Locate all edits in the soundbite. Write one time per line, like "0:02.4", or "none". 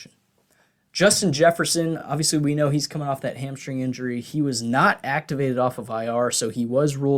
none